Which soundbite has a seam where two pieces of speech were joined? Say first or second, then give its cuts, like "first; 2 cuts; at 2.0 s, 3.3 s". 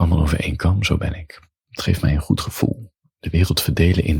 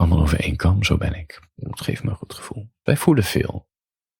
second; 2 cuts; at 1.5 s, 2.9 s